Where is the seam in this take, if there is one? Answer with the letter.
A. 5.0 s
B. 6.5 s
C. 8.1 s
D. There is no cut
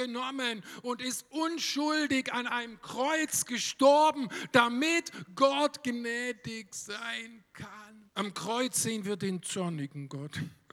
C